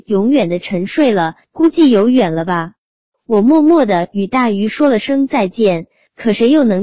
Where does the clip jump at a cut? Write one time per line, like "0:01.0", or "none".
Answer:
0:01.4